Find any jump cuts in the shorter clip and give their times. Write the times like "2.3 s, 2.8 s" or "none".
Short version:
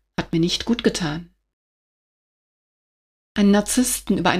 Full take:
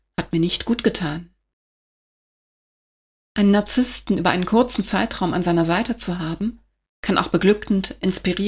none